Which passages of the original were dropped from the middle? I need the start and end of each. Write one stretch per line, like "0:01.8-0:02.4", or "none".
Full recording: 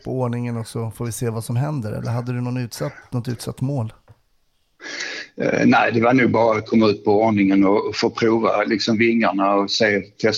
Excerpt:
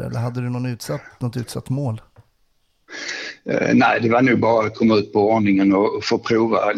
none